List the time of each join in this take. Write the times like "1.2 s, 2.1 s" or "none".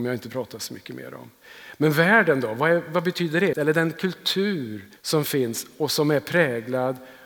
3.5 s, 5.0 s

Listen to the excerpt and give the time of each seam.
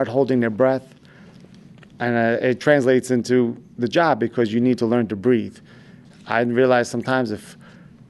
none

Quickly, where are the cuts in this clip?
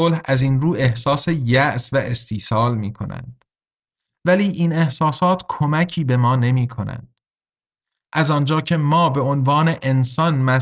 none

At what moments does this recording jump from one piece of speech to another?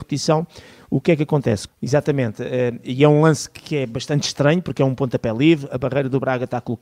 1.7 s

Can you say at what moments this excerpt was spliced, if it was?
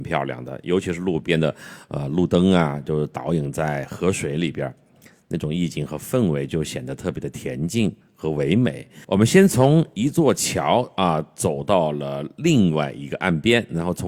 none

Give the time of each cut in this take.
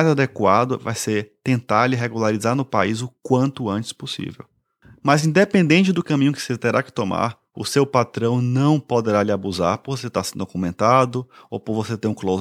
none

